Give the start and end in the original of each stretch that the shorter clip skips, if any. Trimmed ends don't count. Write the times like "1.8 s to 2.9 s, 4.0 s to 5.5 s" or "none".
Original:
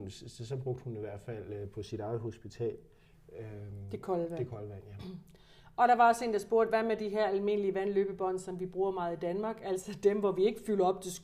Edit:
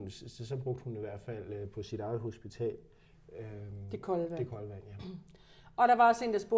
none